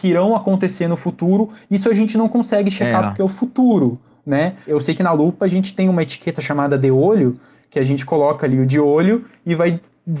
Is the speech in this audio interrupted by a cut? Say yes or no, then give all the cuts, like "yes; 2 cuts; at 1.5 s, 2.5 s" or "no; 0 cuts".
no; 0 cuts